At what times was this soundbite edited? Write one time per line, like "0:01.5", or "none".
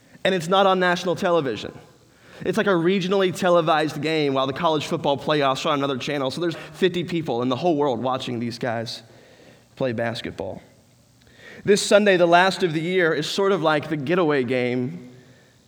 0:06.5